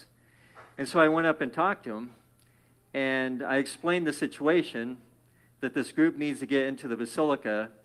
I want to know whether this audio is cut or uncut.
uncut